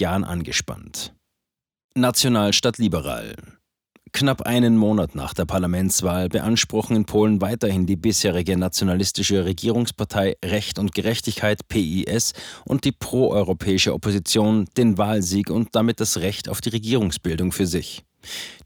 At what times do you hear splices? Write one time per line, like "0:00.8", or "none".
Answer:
none